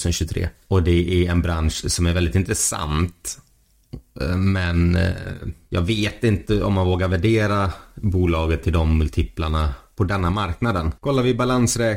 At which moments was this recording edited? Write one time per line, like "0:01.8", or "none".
0:11.0